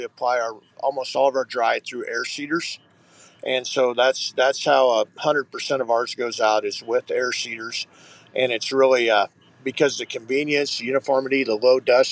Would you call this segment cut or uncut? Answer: uncut